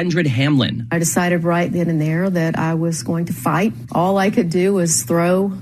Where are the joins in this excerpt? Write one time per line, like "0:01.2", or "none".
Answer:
0:03.9